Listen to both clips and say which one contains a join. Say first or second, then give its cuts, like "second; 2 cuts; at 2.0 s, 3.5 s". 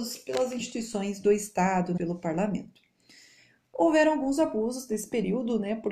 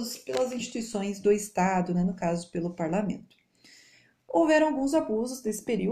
first; 1 cut; at 2.0 s